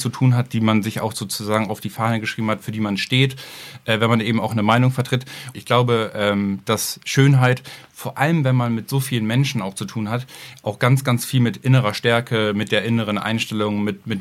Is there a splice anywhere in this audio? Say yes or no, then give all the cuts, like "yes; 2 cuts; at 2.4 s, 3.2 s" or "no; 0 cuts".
yes; 1 cut; at 5.5 s